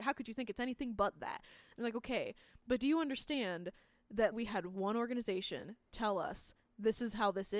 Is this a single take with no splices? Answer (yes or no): no